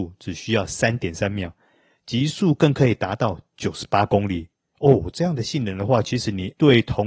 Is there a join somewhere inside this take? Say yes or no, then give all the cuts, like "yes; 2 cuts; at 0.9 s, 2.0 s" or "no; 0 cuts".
no; 0 cuts